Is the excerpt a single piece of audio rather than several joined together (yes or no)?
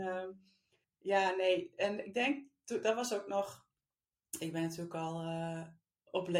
yes